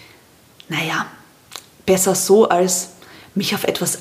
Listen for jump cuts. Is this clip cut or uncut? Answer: uncut